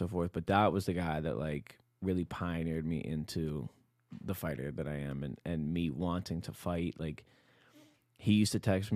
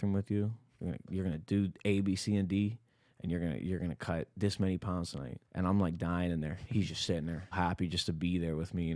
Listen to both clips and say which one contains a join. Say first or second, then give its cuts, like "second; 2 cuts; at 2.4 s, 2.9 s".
second; 2 cuts; at 5.4 s, 7.5 s